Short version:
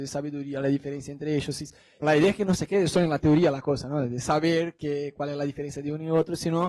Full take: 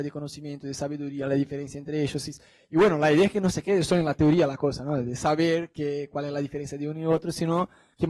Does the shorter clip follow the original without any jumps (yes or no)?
no